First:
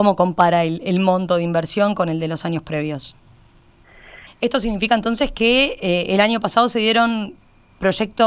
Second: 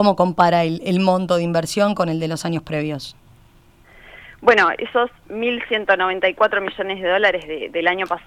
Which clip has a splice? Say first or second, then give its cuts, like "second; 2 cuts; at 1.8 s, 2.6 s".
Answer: first; 1 cut; at 4.3 s